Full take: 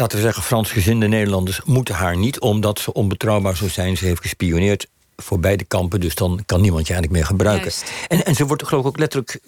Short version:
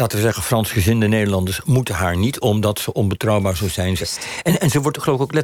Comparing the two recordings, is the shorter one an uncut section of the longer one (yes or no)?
no